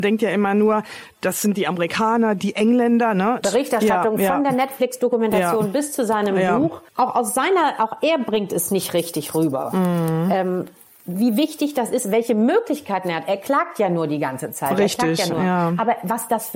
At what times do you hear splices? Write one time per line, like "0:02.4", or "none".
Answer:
0:03.4